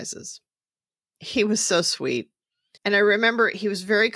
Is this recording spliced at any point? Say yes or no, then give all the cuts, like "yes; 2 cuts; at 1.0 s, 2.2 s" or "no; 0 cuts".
yes; 1 cut; at 2.8 s